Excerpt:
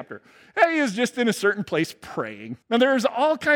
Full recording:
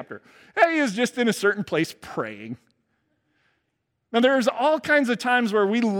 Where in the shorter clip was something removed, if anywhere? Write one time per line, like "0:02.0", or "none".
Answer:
0:02.6